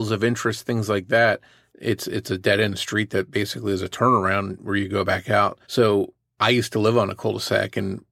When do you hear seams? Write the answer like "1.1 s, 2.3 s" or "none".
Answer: 1.7 s, 5.6 s